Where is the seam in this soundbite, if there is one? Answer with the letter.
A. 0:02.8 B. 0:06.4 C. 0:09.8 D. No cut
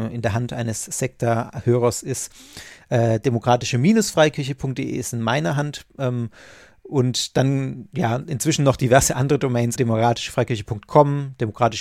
C